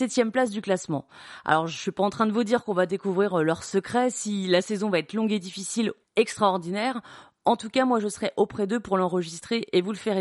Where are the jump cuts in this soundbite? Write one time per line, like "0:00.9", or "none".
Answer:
0:06.0